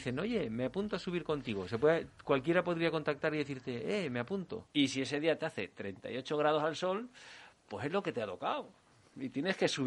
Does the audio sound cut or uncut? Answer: cut